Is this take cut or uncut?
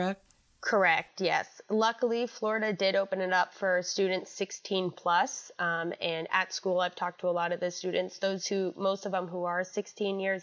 uncut